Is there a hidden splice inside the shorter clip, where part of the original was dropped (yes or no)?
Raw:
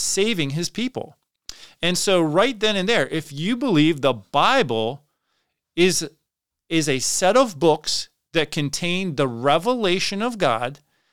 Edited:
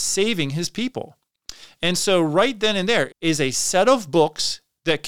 yes